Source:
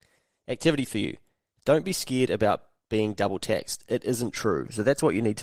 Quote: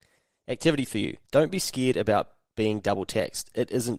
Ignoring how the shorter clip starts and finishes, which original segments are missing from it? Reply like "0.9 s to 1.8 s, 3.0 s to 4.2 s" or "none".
1.2 s to 1.6 s